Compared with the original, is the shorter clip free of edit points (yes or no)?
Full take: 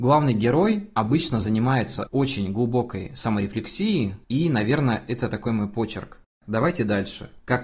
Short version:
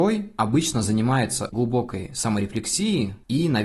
no